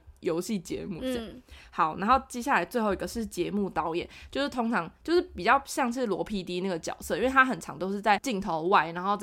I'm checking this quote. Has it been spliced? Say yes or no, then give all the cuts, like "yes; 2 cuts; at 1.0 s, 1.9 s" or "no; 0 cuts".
no; 0 cuts